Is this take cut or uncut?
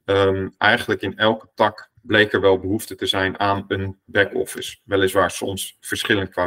cut